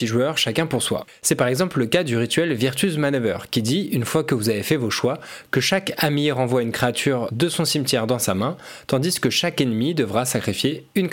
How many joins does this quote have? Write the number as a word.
one